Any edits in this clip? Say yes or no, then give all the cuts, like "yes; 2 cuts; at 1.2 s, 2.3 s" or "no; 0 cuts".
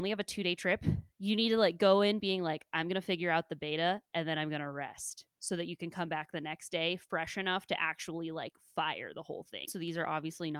yes; 1 cut; at 9.7 s